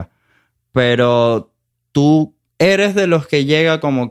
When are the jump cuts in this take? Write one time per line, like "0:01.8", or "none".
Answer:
none